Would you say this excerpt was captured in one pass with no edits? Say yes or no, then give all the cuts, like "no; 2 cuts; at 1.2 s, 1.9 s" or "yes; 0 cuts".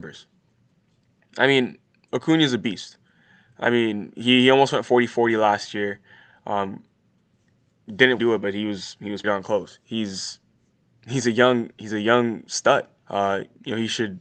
no; 3 cuts; at 8.2 s, 9.2 s, 13.0 s